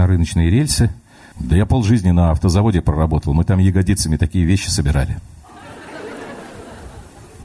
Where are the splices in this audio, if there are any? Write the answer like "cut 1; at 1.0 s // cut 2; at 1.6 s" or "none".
cut 1; at 1.3 s